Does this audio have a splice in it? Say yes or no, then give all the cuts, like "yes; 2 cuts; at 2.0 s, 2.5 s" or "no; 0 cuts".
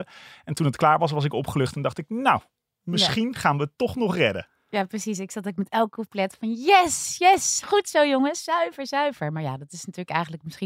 no; 0 cuts